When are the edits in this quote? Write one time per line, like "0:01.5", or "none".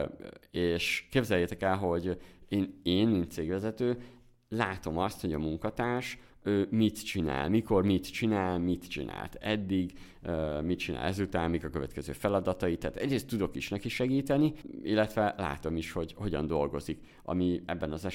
none